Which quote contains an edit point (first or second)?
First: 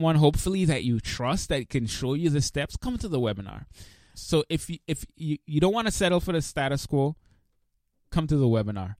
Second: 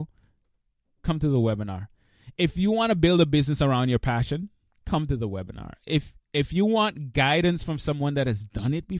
first